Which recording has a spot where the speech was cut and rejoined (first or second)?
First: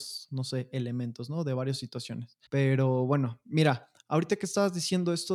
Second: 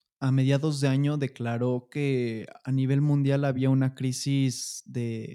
first